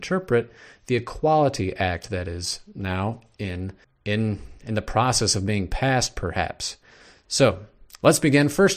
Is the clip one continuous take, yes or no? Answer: no